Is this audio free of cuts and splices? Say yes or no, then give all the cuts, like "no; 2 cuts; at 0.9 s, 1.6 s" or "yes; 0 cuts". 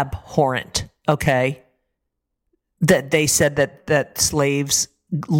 yes; 0 cuts